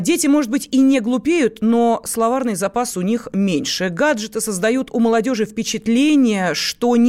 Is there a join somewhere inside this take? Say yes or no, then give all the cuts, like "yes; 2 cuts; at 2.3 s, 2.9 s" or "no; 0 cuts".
no; 0 cuts